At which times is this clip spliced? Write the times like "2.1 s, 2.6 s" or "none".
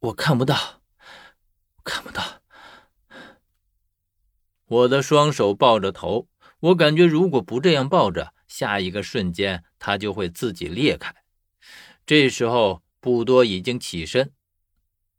none

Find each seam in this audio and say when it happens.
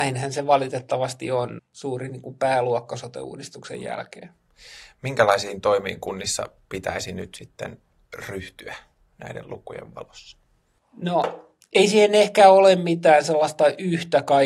1.6 s

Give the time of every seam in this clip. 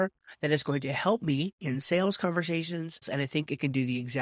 3.0 s

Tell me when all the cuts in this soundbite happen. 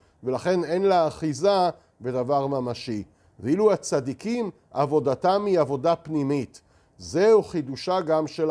none

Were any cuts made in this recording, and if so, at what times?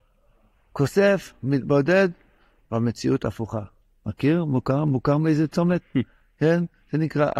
none

